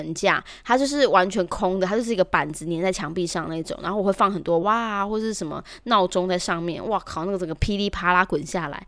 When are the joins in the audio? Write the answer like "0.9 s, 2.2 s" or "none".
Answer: 4.6 s

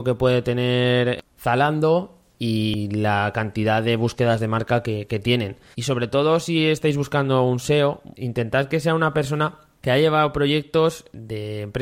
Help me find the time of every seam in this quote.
5.7 s, 8.1 s

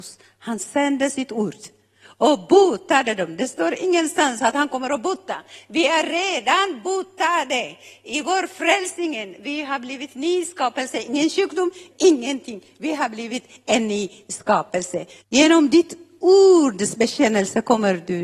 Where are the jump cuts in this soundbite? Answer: 11.9 s, 15.2 s

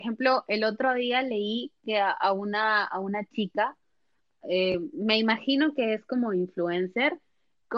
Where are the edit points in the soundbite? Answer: none

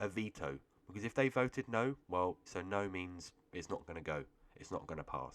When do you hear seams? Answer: 2.5 s

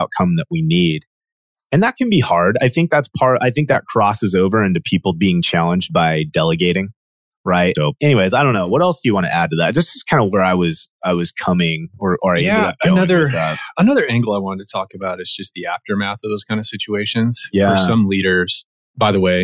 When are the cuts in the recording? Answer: 7.7 s

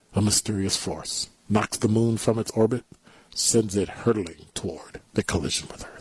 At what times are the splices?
5.1 s

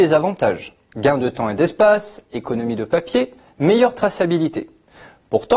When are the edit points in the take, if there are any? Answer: none

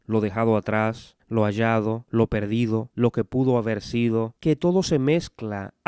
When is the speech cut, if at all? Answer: 2.9 s, 4.4 s

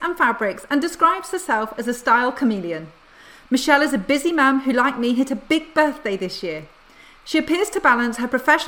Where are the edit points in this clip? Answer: none

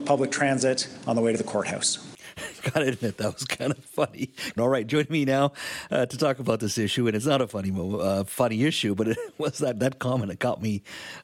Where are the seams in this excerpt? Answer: 4.6 s

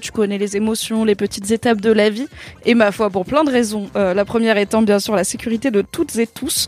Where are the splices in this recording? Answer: 2.6 s

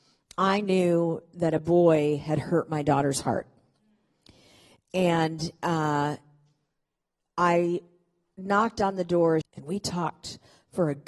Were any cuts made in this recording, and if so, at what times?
9.4 s

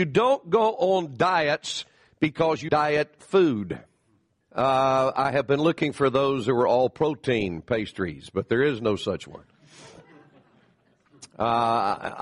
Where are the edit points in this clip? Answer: 2.7 s, 4.4 s

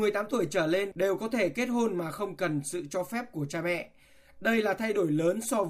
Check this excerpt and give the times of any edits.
none

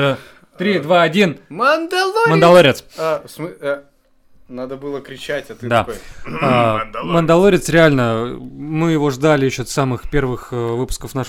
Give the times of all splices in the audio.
none

